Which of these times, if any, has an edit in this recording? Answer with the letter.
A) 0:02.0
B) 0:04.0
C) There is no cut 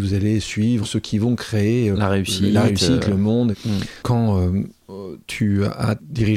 B